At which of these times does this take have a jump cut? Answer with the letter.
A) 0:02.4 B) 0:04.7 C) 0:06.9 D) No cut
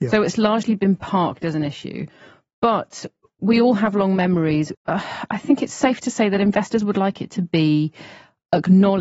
B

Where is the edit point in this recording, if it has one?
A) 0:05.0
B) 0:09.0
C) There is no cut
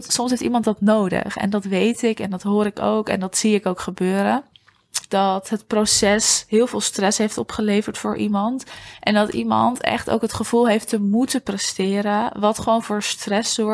A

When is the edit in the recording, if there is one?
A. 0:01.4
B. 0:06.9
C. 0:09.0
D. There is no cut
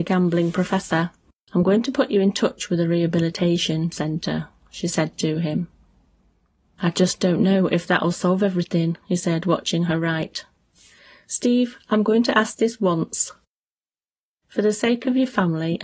A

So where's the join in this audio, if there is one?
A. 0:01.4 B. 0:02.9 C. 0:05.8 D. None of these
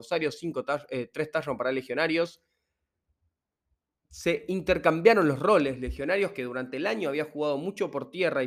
D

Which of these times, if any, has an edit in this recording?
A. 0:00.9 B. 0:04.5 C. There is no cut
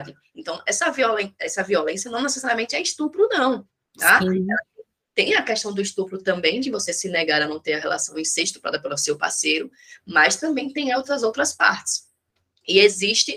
C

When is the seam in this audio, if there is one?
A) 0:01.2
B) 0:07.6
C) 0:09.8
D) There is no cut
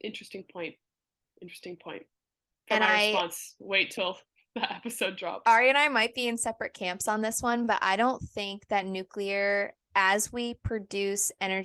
D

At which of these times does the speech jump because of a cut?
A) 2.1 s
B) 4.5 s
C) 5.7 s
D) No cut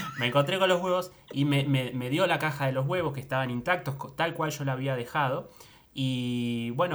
D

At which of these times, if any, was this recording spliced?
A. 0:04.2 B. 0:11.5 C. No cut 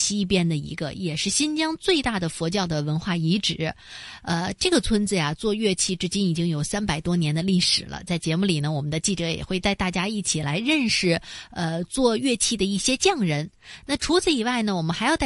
A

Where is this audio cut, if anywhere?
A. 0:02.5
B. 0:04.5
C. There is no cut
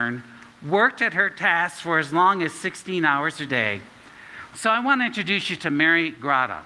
B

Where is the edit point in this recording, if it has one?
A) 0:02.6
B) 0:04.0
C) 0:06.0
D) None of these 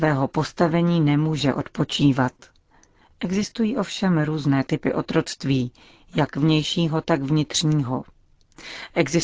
D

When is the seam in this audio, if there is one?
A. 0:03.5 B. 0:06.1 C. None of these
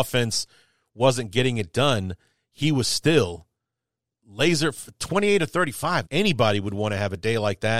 B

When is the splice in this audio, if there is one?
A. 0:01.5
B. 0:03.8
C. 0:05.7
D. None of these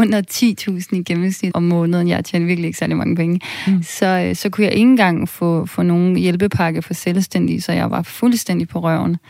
A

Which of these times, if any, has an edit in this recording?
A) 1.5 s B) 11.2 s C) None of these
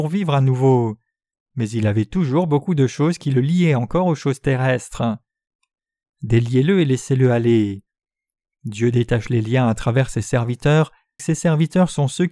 B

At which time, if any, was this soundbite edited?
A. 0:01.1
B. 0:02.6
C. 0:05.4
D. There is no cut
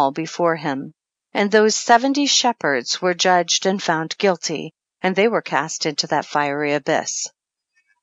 A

